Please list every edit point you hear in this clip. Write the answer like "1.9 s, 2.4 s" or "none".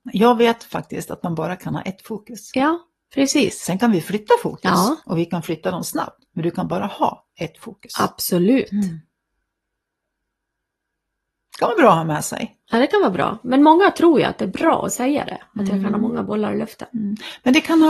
none